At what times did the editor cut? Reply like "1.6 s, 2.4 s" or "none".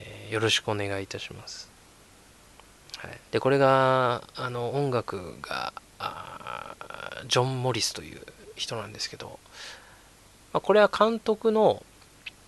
3.3 s